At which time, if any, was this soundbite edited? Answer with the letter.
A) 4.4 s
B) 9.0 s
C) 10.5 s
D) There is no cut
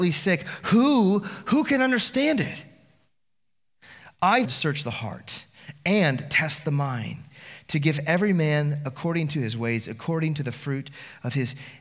A